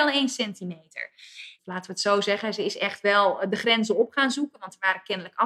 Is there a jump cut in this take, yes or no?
yes